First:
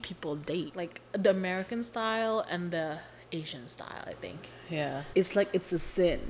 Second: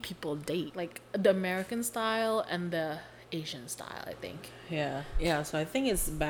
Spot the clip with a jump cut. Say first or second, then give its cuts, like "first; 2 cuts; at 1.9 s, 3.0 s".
first; 1 cut; at 5.1 s